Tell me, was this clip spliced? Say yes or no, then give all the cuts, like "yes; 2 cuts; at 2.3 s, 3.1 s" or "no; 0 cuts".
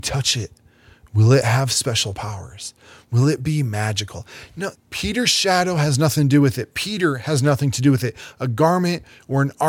yes; 1 cut; at 4.7 s